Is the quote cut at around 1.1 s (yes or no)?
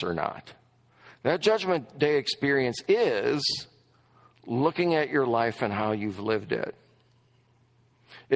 no